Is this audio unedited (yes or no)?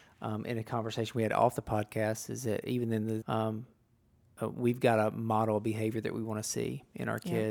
no